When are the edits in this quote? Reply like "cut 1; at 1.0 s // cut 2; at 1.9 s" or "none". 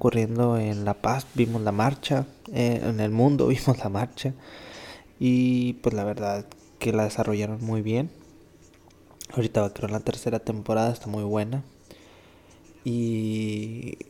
cut 1; at 5.1 s